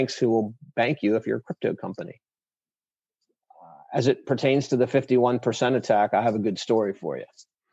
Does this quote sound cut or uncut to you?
uncut